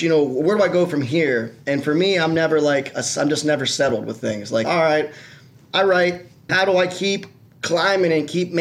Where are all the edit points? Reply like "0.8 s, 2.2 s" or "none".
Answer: 4.6 s, 6.5 s